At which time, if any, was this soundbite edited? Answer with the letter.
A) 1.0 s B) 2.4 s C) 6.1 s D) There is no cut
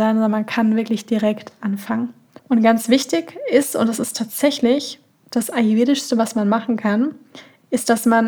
B